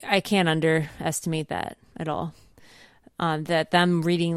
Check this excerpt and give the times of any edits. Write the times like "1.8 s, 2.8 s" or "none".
none